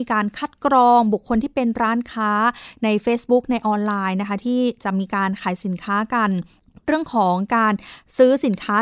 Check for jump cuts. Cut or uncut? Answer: uncut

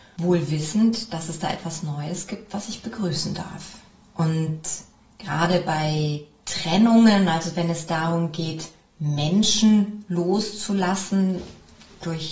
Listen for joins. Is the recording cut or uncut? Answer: uncut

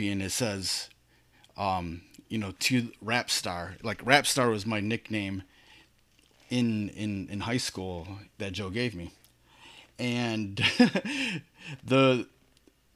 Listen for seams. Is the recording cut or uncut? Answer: uncut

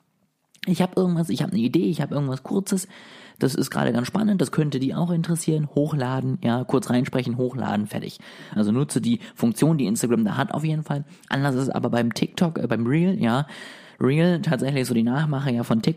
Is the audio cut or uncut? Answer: cut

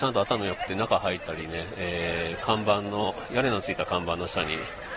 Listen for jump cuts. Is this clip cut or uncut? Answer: uncut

